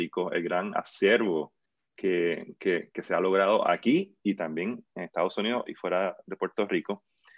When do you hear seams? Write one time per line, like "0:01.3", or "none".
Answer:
none